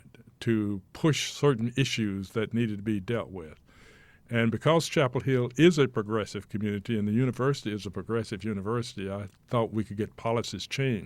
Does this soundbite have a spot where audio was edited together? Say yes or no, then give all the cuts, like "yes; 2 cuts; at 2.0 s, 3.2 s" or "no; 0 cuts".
no; 0 cuts